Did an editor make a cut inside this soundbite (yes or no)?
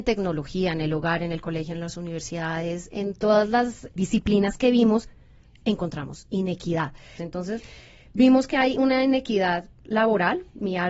yes